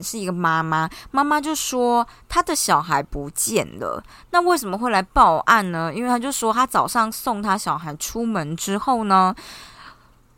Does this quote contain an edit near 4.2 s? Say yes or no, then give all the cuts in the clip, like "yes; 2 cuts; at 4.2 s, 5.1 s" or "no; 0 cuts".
no; 0 cuts